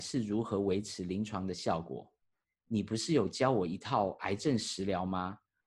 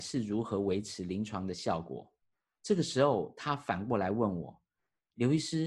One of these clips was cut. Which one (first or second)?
first